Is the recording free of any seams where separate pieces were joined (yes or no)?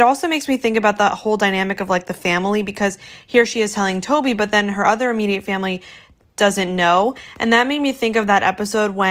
yes